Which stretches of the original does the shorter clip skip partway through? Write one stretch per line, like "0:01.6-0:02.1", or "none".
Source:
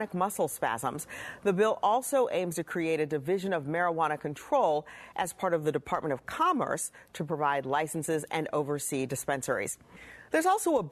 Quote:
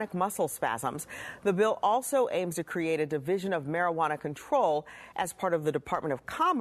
none

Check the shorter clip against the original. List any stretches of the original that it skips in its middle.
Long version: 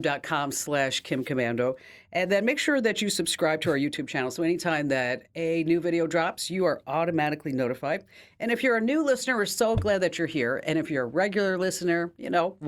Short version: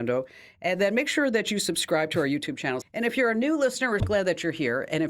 0:04.3-0:08.3
0:09.5-0:09.8

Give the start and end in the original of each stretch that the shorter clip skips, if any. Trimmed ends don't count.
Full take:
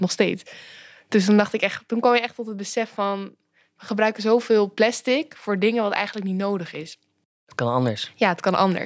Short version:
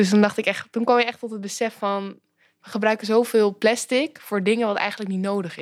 none

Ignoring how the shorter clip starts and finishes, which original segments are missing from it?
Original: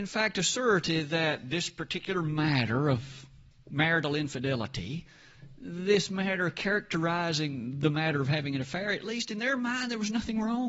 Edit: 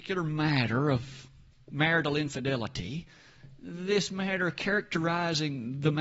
none

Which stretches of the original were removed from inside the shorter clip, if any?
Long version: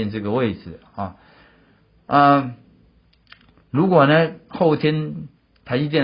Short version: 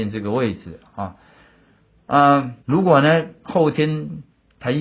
0:02.6-0:03.7

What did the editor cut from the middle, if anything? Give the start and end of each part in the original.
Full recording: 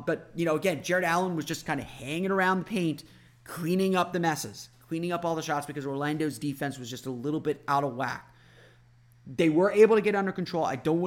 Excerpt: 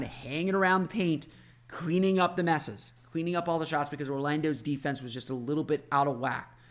none

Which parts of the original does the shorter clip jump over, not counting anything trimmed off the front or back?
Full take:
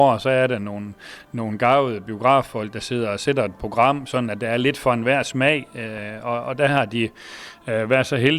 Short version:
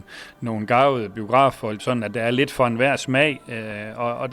0:02.7-0:04.1

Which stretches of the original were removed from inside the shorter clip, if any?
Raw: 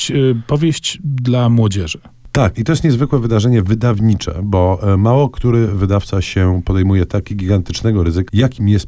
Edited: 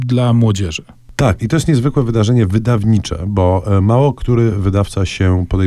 none

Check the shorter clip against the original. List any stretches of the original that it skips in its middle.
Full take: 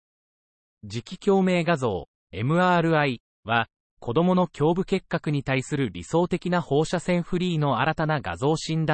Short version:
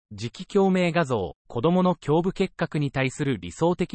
0:02.1-0:03.9

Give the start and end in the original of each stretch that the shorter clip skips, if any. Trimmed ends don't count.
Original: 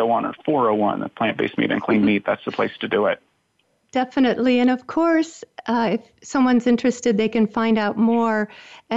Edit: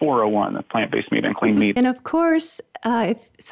0:02.2-0:04.6

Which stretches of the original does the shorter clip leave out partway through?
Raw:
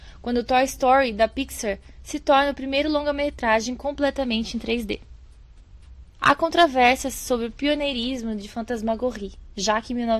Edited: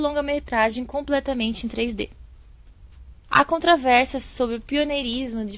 none

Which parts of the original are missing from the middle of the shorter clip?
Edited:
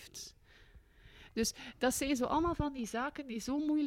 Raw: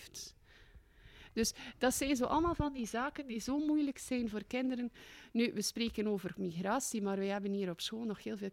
none

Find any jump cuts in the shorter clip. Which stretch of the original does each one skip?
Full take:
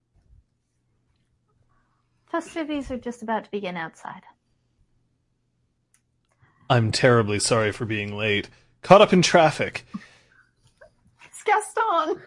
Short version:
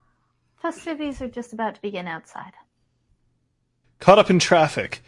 0:05.5-0:08.7

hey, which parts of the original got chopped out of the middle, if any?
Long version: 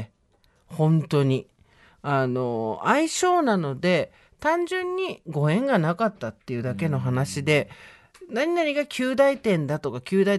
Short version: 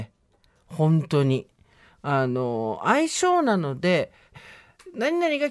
0:04.3-0:07.7

